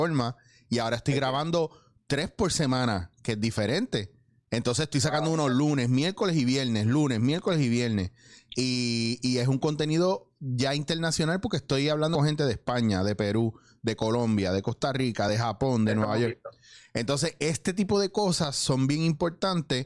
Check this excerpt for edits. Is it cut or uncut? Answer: uncut